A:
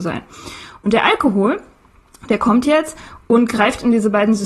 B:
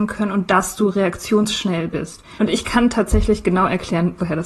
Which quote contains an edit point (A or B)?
B